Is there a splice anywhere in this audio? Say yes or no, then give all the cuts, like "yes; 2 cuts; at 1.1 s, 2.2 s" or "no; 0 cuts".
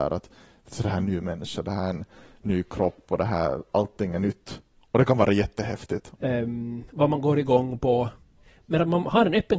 yes; 1 cut; at 6.1 s